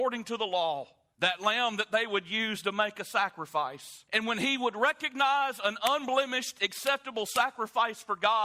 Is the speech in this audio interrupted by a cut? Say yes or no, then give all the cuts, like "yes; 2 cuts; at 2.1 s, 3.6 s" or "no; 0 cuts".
yes; 2 cuts; at 1.1 s, 4.1 s